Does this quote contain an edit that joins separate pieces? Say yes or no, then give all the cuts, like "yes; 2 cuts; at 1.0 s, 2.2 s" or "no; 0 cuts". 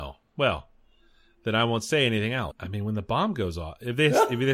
yes; 1 cut; at 2.5 s